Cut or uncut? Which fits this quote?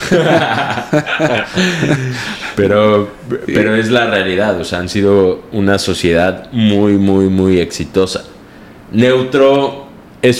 uncut